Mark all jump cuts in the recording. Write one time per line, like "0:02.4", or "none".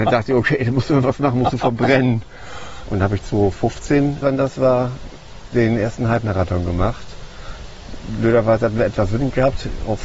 0:02.8
0:04.2